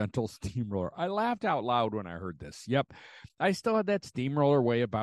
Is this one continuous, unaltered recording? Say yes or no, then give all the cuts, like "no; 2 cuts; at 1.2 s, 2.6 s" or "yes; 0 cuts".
yes; 0 cuts